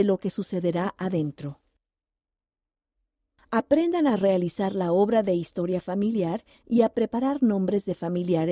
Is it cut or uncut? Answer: uncut